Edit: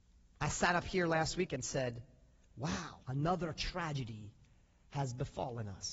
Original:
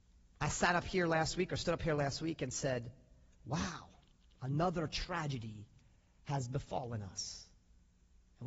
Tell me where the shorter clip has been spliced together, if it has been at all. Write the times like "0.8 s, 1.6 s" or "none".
1.5 s, 3.0 s